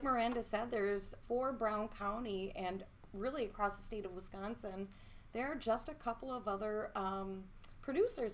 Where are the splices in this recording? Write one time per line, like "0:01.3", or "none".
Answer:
0:01.2